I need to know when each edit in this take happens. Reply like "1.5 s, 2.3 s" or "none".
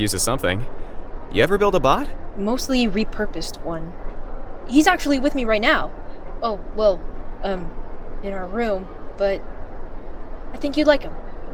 none